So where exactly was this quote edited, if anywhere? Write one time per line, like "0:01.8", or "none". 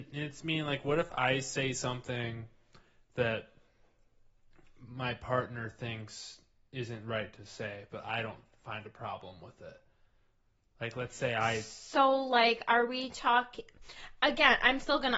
none